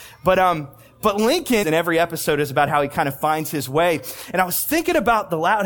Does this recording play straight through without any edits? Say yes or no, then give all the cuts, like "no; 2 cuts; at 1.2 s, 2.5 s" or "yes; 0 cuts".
no; 1 cut; at 1.6 s